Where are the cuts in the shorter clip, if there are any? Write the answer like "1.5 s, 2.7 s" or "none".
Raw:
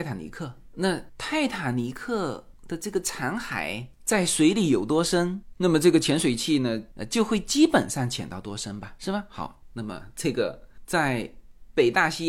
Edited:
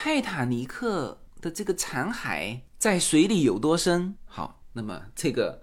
4.3 s

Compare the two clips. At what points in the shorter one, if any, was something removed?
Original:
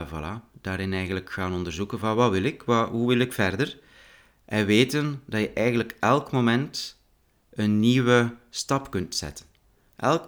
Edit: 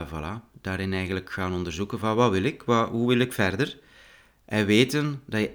none

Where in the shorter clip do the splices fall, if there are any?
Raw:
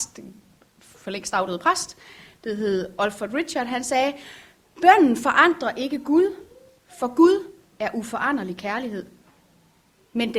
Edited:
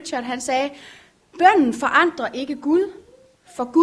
none

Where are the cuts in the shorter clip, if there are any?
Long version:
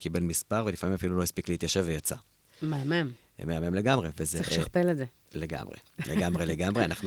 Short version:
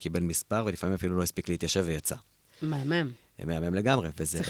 none

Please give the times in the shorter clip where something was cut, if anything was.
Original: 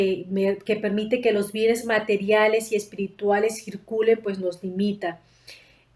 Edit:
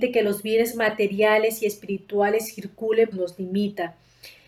3.1 s

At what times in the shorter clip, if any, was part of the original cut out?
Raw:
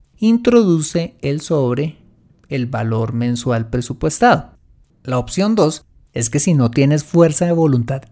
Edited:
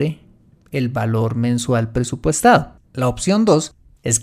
2.8 s

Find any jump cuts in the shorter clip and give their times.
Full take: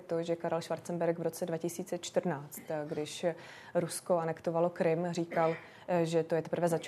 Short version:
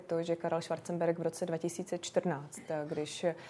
none

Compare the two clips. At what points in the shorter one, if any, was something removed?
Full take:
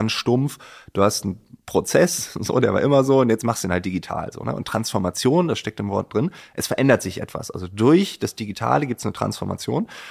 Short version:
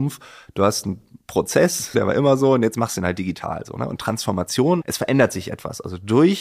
1.9 s, 4.8 s

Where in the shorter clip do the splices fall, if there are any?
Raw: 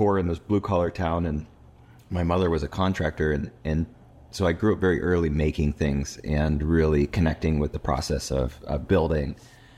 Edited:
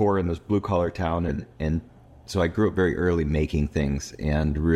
1.3 s

